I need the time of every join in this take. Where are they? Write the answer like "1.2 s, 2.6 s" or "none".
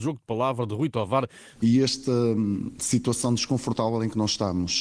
1.6 s

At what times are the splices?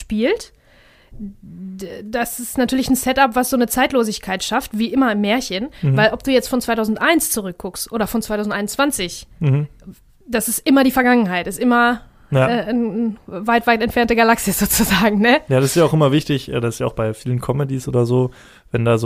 none

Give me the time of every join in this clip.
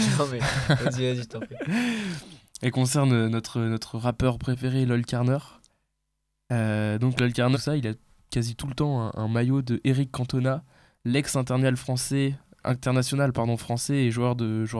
7.5 s

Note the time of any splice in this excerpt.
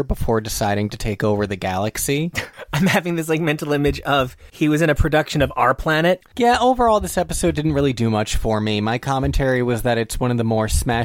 2.3 s, 6.3 s

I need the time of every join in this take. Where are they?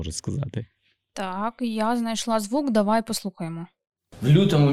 none

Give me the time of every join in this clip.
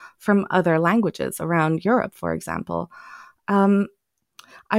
none

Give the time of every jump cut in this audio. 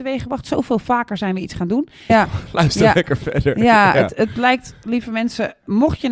2.1 s

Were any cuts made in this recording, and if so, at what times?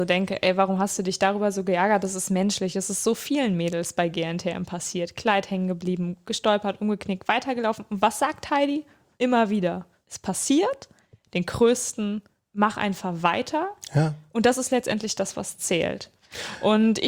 none

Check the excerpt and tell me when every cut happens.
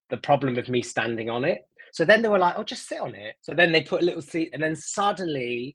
1.9 s, 3.4 s, 4.5 s

